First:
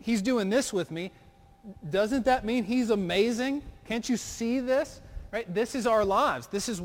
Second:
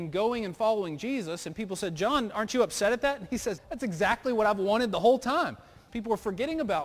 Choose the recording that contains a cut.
second; 2 cuts; at 3.6 s, 5.9 s

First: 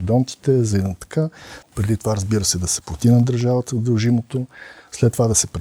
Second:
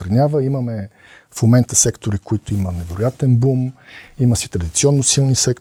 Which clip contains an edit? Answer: first; 1 cut; at 1.6 s

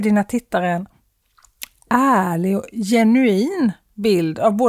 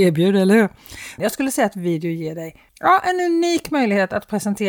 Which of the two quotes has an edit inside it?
second; 2 cuts; at 1.2 s, 2.7 s

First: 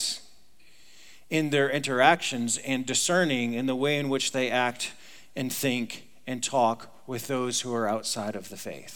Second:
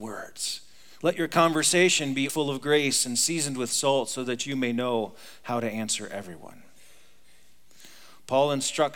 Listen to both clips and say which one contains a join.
second; 2 cuts; at 1.0 s, 2.3 s

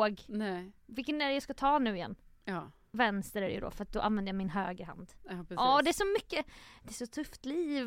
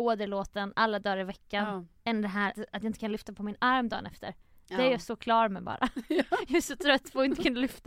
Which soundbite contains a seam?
second; 1 cut; at 2.5 s

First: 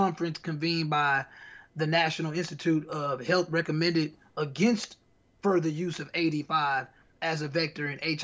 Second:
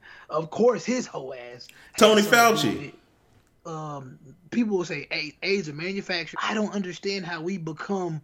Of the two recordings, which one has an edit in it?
second; 2 cuts; at 3.5 s, 6.3 s

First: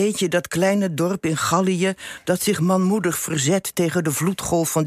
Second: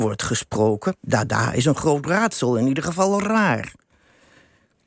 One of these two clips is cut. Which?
second; 1 cut; at 1.0 s

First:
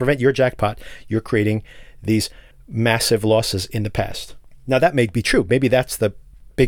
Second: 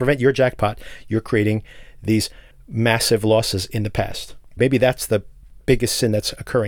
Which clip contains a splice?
second; 1 cut; at 4.6 s

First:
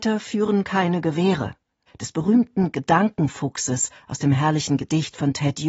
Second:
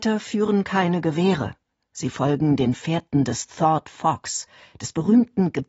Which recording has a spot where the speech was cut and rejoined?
first; 1 cut; at 1.9 s

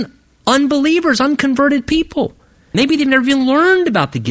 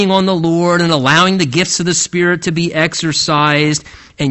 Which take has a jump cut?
first; 1 cut; at 2.7 s

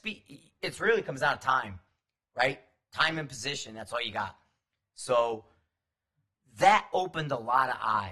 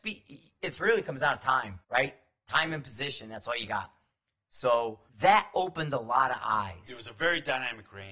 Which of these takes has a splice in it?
second; 2 cuts; at 1.8 s, 5.1 s

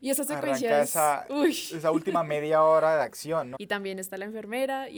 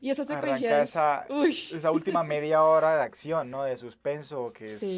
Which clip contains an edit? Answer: first; 1 cut; at 3.6 s

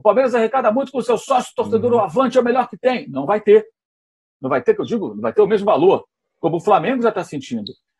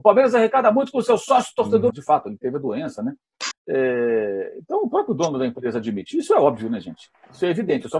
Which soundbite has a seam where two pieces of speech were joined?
second; 2 cuts; at 1.9 s, 3.5 s

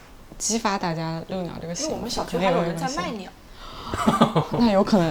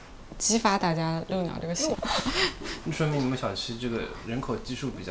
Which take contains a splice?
second; 1 cut; at 1.9 s

